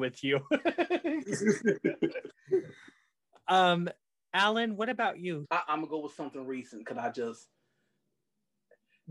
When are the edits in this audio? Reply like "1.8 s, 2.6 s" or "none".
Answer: 5.4 s